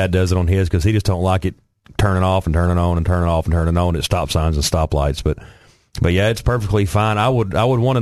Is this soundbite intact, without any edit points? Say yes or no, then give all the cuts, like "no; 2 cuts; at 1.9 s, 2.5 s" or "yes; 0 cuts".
yes; 0 cuts